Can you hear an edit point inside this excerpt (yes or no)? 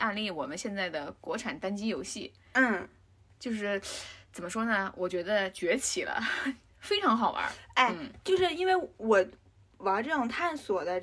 no